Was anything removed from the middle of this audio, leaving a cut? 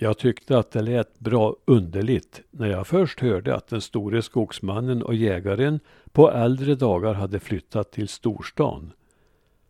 no; 0 cuts

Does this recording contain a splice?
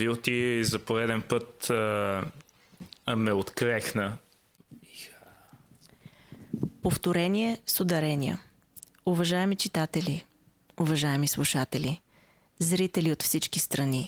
yes; 1 cut; at 4.7 s

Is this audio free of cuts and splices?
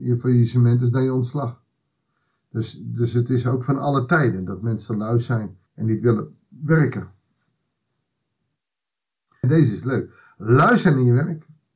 no; 2 cuts; at 5.7 s, 9.4 s

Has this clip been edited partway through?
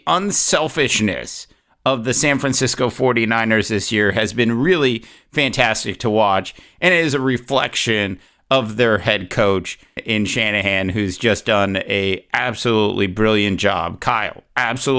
yes; 1 cut; at 10.0 s

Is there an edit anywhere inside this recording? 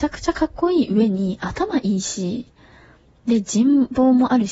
no; 0 cuts

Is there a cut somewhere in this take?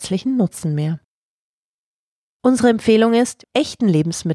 yes; 1 cut; at 3.4 s

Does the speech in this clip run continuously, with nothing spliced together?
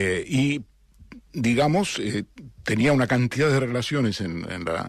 yes; 0 cuts

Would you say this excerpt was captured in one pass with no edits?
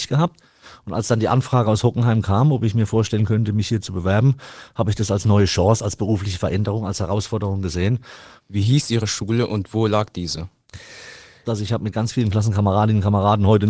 no; 2 cuts; at 8.4 s, 11.4 s

